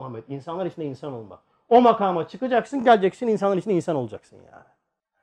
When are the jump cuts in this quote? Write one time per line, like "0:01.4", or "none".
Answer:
none